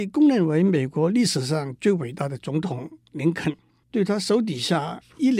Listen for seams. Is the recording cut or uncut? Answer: cut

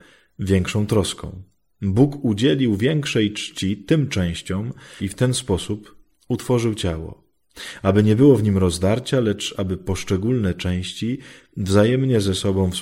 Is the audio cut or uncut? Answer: cut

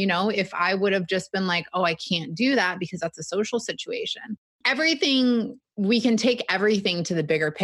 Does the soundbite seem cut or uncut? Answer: cut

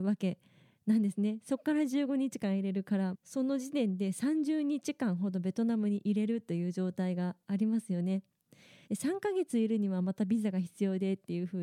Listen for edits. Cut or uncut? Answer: cut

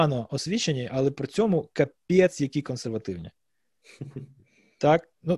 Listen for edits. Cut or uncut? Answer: uncut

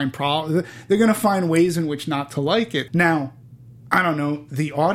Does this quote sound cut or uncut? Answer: cut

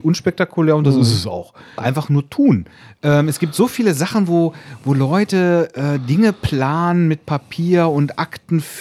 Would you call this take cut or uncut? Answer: cut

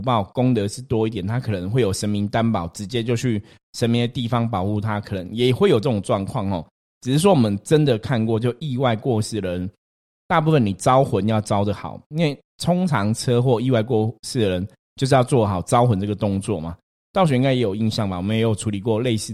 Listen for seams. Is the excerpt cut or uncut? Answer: uncut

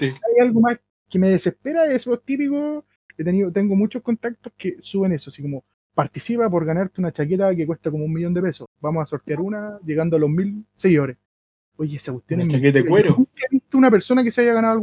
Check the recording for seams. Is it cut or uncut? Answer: uncut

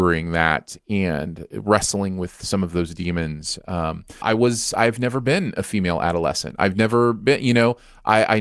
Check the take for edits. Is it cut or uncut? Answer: cut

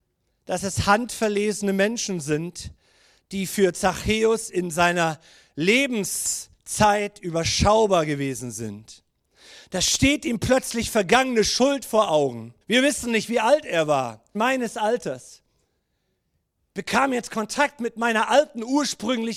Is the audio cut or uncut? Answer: cut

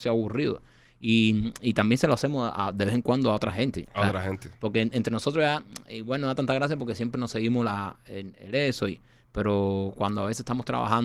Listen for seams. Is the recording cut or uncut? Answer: uncut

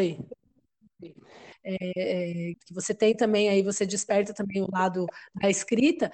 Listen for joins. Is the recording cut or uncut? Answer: cut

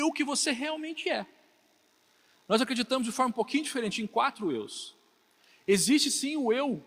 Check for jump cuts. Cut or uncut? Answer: uncut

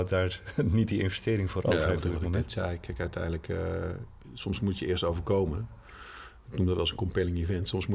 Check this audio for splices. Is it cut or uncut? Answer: uncut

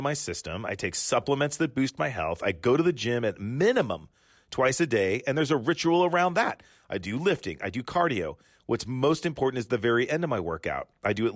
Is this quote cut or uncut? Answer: uncut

